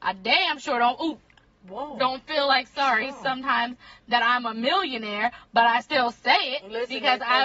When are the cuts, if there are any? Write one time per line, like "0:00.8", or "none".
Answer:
none

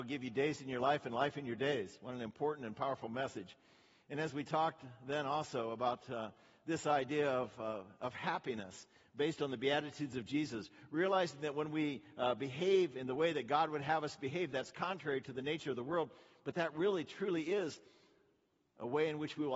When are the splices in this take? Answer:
none

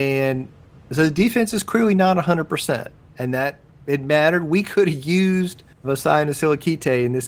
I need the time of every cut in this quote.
0:05.8

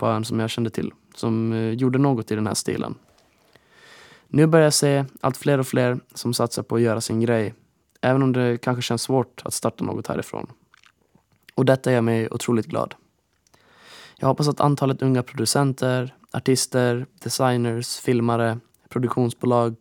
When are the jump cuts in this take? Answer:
none

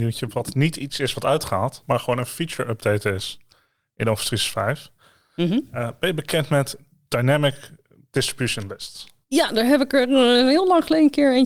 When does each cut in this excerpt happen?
none

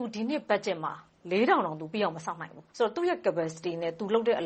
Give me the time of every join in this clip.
0:02.7

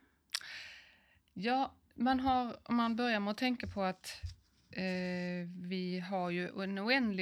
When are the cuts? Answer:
none

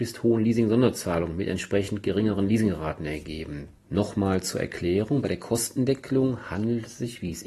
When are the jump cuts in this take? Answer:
0:03.8

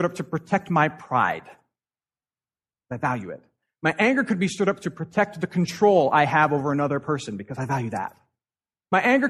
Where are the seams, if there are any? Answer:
none

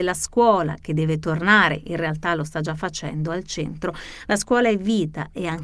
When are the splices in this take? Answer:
0:04.2

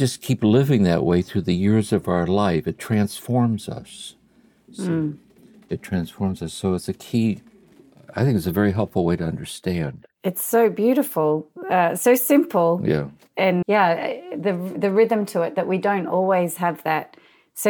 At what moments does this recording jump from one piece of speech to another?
0:13.6

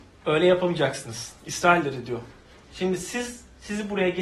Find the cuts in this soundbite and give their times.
none

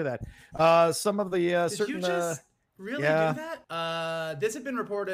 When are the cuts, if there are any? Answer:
0:03.6

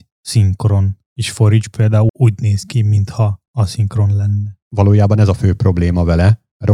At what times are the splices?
0:02.1
0:04.6

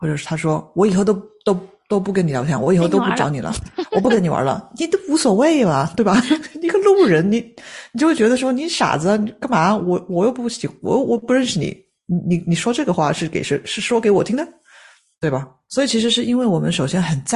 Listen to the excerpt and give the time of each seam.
none

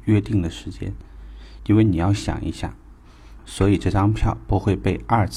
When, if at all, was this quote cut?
0:01.6
0:03.4

